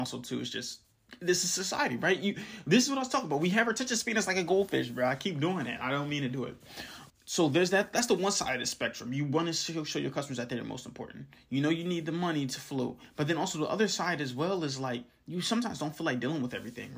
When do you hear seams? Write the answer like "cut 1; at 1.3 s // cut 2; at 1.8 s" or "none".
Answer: cut 1; at 7.1 s